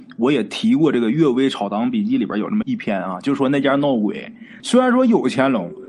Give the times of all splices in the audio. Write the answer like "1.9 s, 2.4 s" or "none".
2.6 s, 4.6 s